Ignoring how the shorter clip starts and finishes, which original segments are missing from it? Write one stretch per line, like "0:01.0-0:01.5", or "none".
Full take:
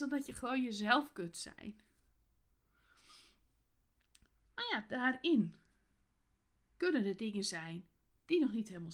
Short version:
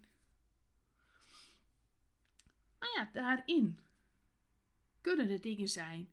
none